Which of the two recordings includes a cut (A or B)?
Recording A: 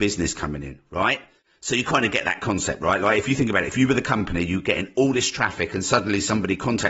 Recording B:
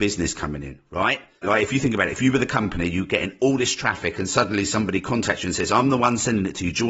B